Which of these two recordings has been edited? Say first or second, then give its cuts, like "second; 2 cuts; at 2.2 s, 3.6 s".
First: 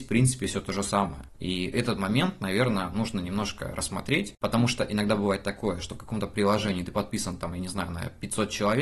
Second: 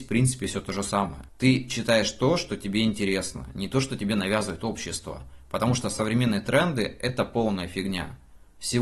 first; 1 cut; at 1.3 s